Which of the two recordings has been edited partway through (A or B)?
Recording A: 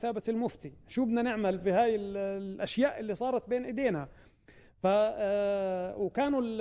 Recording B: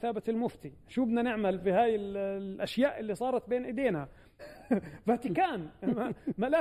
B